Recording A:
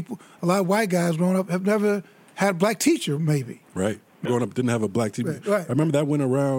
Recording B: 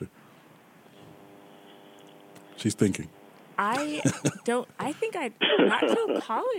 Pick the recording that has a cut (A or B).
A